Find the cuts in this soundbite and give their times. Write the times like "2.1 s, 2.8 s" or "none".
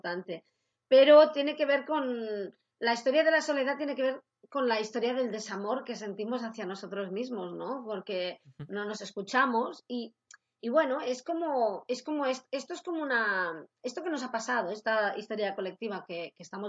none